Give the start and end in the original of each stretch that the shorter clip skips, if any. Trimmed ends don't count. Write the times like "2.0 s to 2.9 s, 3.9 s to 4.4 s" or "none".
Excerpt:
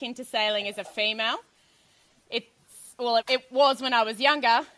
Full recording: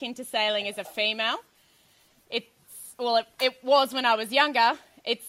3.2 s to 3.3 s

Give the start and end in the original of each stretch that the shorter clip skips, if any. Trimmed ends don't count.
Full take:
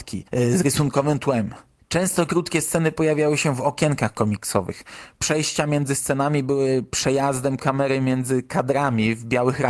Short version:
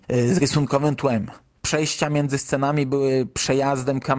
1.8 s to 5.1 s

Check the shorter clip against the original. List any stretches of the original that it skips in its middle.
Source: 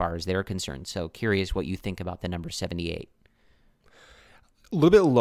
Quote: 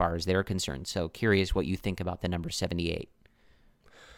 none

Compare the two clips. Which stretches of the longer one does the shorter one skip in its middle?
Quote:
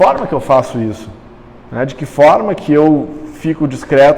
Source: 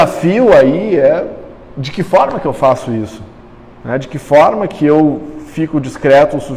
none

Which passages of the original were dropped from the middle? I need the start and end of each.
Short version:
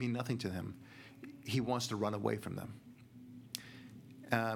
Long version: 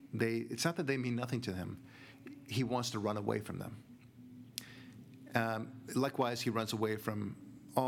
none

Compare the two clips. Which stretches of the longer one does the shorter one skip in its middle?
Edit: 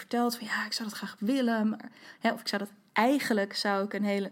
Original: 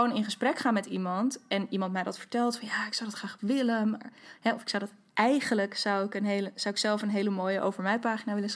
none

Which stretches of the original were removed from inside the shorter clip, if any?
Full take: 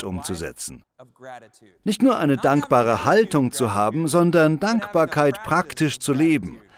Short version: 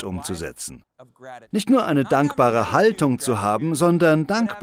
1.4 s to 1.8 s

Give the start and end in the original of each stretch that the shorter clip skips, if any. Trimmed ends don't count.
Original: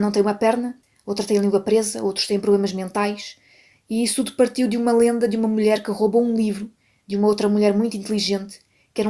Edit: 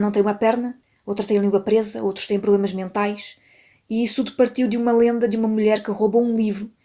none

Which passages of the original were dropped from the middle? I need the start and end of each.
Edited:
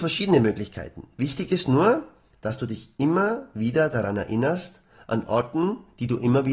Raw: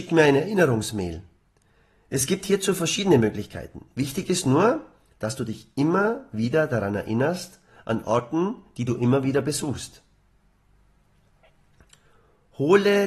none

